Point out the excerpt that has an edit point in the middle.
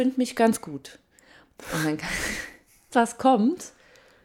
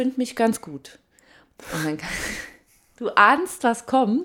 first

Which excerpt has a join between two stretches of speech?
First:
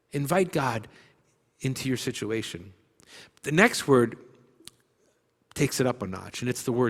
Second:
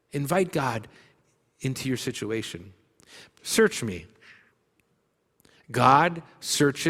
second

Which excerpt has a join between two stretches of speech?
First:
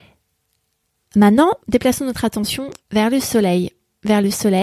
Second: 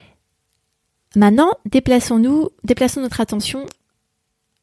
first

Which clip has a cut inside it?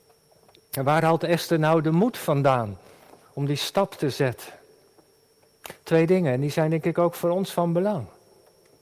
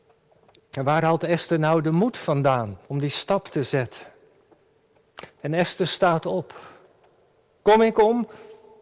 second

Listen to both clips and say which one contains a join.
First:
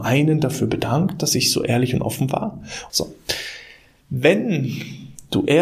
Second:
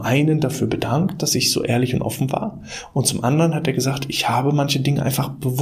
first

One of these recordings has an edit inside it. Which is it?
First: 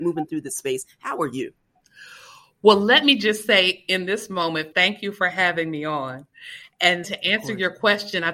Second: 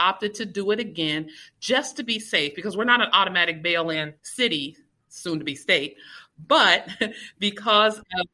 first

